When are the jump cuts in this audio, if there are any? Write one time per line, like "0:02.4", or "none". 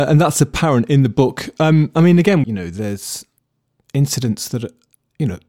0:02.4

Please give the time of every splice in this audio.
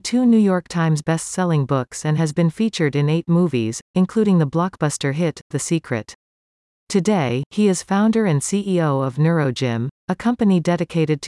none

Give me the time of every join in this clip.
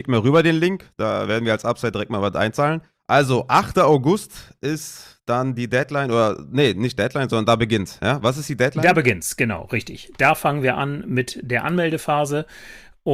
none

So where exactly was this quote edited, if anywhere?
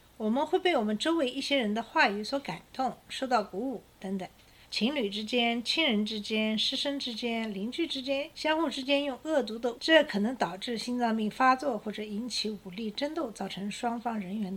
0:04.6
0:08.3
0:09.7

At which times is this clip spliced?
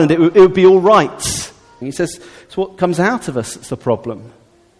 0:01.8

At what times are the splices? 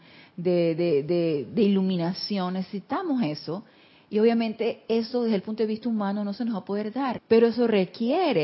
0:07.2

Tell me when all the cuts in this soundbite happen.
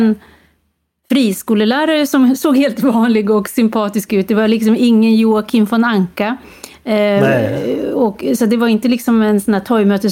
none

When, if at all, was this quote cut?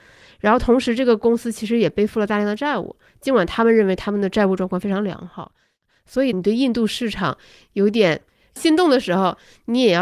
0:06.3

